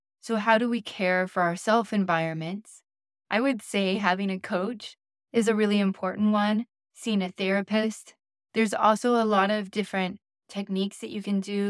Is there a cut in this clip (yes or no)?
no